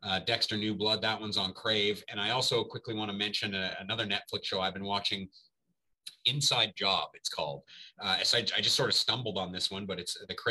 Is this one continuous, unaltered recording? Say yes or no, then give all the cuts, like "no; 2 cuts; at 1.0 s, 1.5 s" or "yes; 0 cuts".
yes; 0 cuts